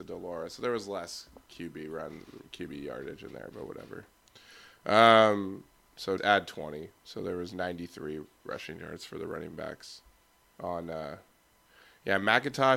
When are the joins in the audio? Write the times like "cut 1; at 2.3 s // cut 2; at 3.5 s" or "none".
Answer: cut 1; at 6.2 s